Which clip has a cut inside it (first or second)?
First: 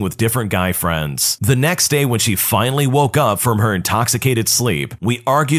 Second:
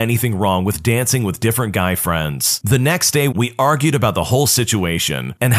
second